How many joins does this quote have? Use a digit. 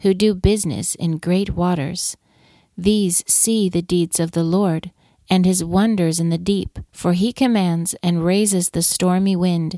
1